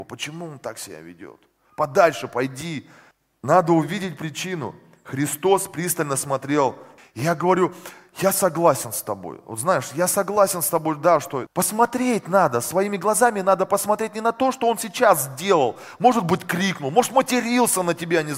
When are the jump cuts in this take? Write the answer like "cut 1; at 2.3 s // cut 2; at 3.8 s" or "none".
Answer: cut 1; at 7.0 s // cut 2; at 11.5 s